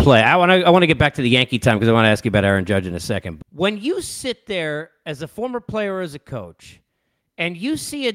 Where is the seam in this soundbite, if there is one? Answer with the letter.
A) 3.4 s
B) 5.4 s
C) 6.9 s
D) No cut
A